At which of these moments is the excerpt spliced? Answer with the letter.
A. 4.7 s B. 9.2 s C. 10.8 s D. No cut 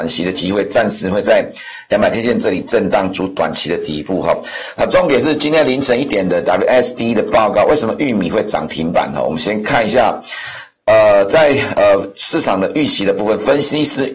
D